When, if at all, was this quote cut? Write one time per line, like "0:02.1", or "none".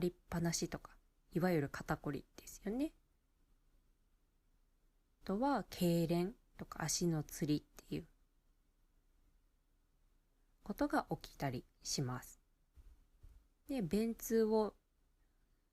0:13.6